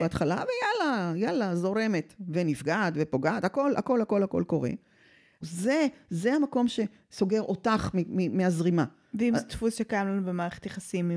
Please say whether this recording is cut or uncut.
cut